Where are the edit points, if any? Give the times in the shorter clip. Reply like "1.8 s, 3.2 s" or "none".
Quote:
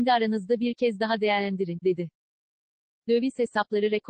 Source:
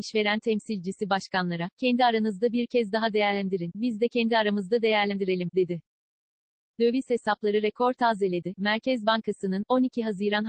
1.8 s